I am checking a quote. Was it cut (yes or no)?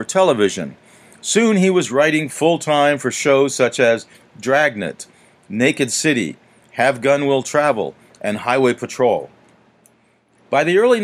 no